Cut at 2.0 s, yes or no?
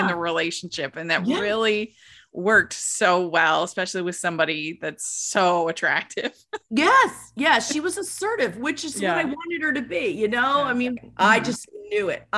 no